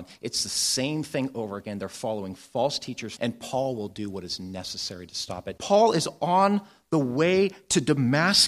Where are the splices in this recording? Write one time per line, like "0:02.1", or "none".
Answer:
0:03.2
0:05.6